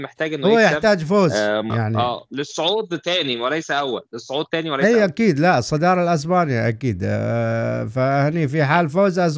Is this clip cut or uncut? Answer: cut